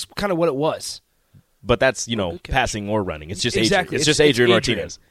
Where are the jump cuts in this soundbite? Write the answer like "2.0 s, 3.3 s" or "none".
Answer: none